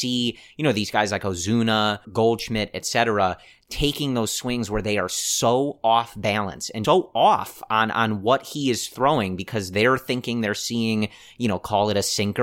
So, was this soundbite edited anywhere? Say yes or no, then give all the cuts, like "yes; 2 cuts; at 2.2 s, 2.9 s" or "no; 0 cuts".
yes; 2 cuts; at 2.0 s, 6.8 s